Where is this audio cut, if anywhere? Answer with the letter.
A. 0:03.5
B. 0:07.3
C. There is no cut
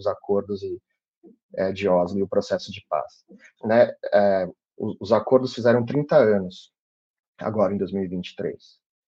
A